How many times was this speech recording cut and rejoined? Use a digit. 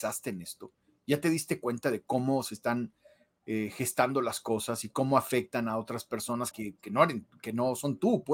1